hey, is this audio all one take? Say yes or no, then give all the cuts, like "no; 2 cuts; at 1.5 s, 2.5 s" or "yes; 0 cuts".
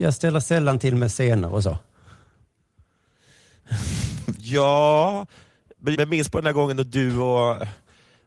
no; 1 cut; at 5.9 s